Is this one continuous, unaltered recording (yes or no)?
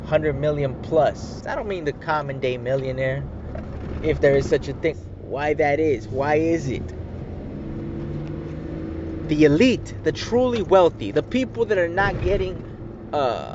no